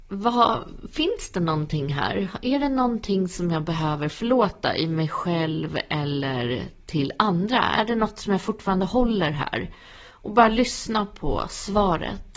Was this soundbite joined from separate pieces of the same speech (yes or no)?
no